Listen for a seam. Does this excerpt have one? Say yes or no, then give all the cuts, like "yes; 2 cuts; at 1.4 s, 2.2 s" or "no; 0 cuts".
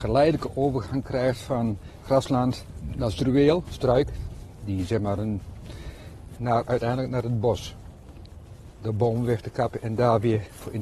yes; 2 cuts; at 6.4 s, 8.7 s